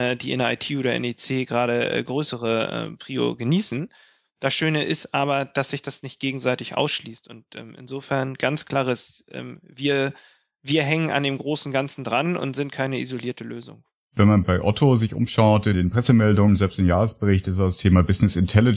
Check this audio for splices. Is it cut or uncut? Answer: uncut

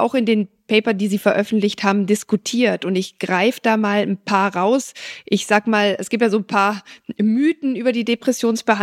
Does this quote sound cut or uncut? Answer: uncut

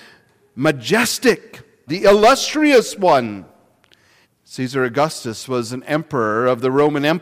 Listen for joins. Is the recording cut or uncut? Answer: cut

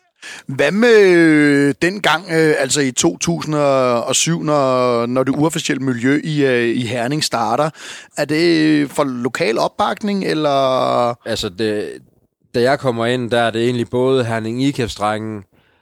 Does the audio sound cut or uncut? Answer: cut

